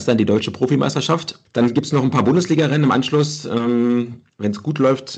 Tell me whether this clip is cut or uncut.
uncut